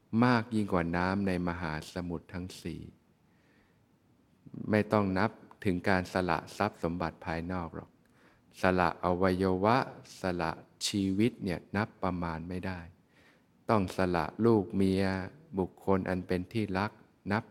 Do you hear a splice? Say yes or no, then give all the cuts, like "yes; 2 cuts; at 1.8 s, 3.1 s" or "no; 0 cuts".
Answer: no; 0 cuts